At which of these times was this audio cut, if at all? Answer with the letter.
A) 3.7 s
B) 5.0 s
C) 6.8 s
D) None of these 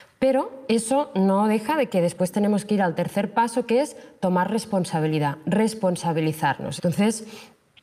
C